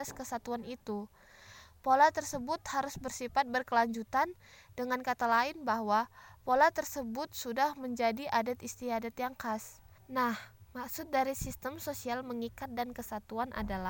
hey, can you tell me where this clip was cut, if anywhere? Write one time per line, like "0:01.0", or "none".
0:10.0